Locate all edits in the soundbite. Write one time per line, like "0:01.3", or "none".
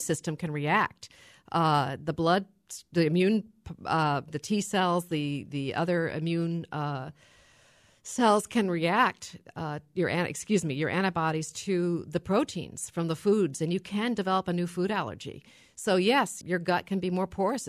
0:16.4